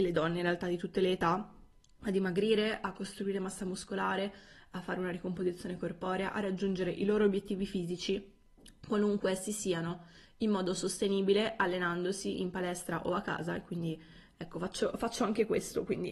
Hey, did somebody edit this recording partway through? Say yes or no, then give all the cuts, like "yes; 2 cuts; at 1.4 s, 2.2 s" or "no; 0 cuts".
no; 0 cuts